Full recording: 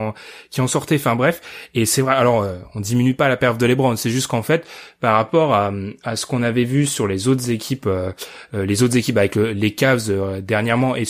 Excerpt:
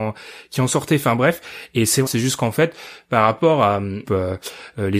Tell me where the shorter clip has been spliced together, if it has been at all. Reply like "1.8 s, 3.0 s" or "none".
2.1 s, 4.0 s